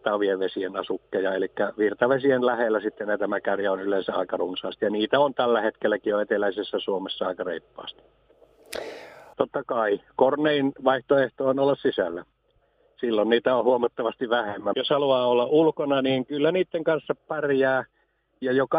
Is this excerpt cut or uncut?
cut